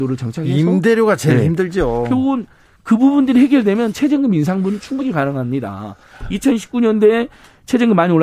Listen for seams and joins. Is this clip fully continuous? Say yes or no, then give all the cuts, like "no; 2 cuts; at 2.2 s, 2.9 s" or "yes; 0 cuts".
yes; 0 cuts